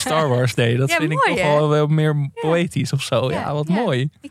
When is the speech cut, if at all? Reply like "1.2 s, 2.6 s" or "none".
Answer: none